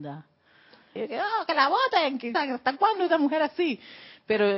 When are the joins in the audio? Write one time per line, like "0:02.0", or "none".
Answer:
0:01.0
0:02.3